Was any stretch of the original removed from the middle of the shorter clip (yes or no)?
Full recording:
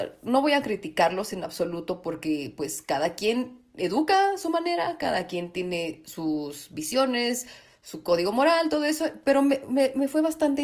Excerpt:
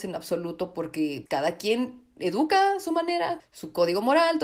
yes